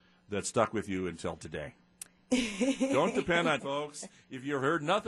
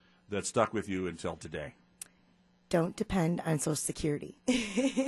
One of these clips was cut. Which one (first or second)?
first